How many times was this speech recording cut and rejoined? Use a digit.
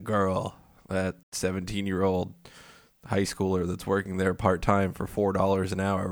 1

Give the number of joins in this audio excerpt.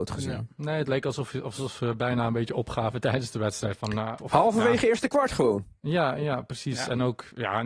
1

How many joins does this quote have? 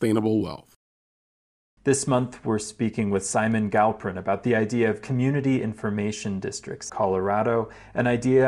2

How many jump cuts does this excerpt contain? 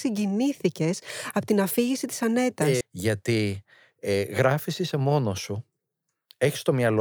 1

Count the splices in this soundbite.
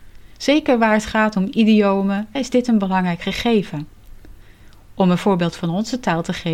1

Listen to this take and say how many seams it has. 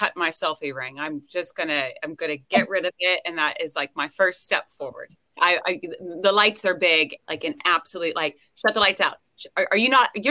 2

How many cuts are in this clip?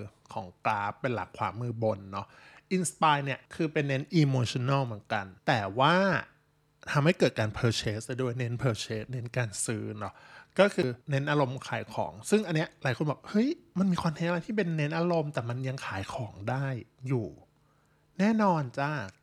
3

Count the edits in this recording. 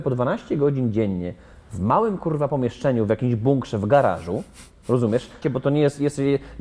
1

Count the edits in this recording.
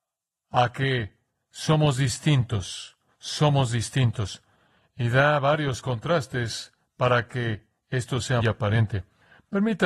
1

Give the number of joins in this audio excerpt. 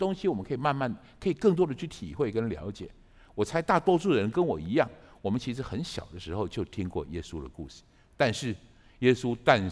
0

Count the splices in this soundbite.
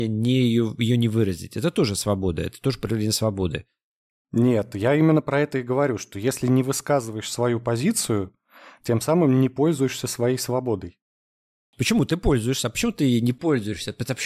0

